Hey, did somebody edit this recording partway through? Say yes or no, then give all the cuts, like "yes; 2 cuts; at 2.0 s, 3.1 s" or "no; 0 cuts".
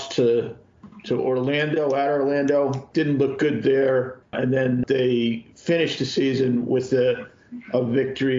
no; 0 cuts